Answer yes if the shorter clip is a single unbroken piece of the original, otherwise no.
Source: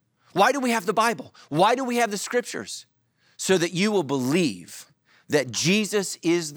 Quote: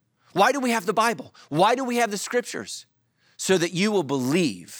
yes